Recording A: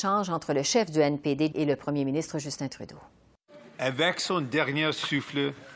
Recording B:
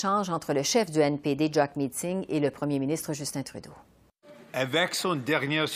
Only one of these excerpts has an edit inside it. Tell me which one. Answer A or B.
A